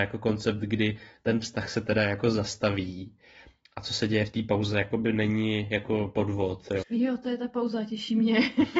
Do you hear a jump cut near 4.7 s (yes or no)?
no